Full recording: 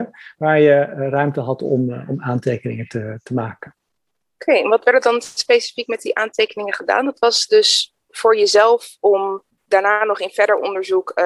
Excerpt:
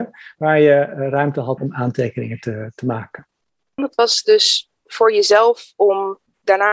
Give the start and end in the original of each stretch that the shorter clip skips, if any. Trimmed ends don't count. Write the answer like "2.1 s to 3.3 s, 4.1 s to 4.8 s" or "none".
1.6 s to 2.1 s, 4.3 s to 7.0 s